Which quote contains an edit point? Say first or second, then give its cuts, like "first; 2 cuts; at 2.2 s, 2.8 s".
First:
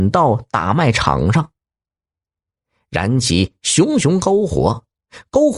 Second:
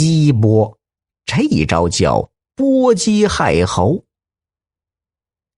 second; 1 cut; at 1.1 s